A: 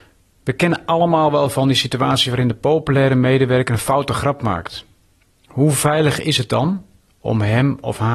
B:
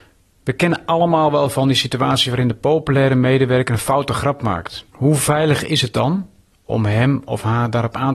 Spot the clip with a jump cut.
B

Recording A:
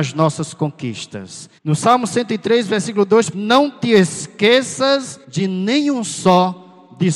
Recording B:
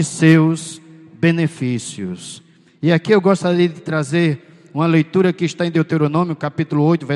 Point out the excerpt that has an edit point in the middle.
A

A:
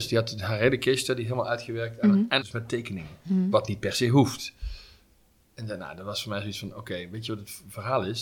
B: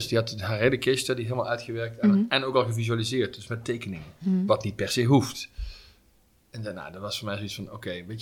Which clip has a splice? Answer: A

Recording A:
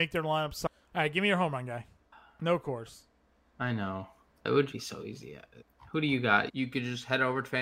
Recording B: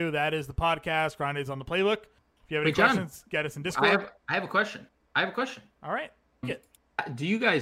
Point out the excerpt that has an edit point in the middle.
A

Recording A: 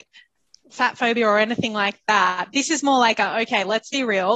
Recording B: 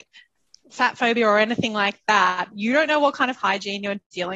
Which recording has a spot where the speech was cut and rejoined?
B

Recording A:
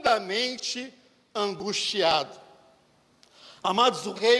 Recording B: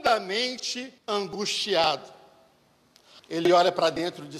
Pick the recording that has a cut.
B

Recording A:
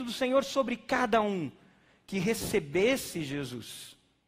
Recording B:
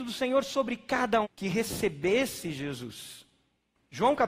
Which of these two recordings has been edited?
B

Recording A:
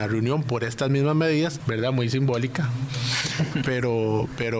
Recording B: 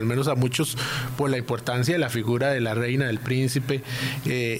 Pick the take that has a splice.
A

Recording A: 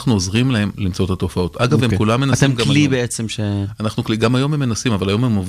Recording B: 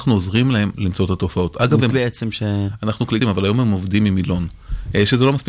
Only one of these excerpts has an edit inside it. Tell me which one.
B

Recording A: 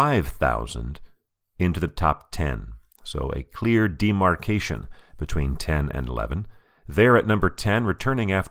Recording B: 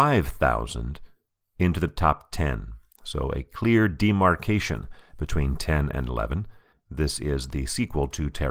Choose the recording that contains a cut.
B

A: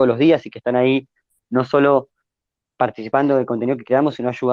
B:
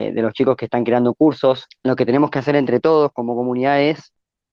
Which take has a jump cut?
B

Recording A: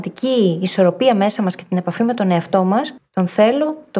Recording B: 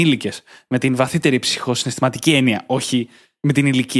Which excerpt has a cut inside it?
A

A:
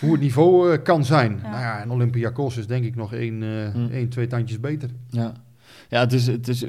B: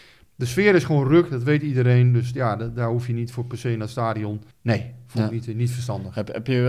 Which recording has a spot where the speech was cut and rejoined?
B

